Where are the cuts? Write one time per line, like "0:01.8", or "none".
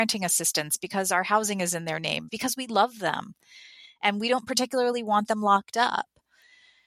0:02.3